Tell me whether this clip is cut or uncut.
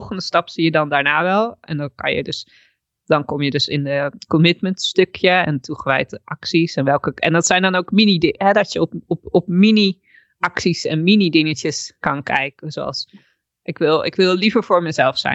uncut